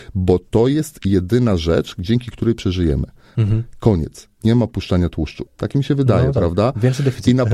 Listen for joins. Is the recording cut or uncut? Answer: cut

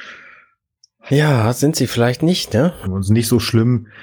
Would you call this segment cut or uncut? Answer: cut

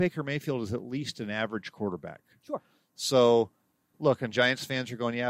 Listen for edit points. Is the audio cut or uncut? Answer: cut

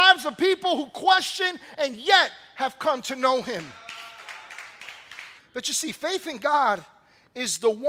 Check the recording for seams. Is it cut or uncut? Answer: cut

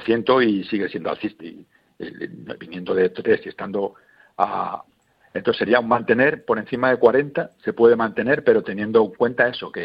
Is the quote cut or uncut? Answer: cut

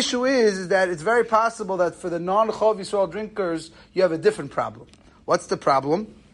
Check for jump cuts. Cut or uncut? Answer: uncut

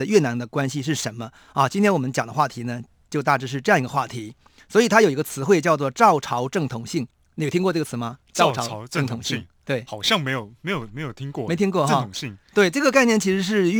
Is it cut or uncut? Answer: uncut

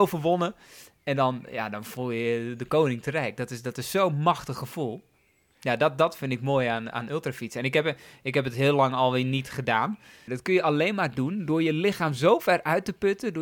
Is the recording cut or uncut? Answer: cut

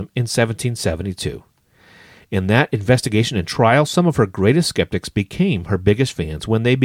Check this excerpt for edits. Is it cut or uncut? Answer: uncut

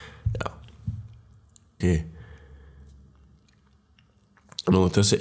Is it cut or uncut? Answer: cut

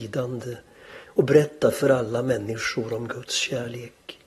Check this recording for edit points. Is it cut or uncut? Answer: uncut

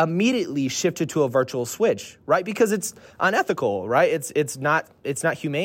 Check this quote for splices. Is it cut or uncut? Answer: uncut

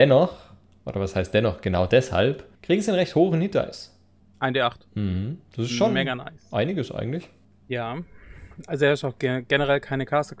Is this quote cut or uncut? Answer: cut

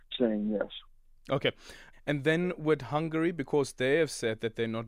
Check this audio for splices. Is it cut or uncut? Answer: cut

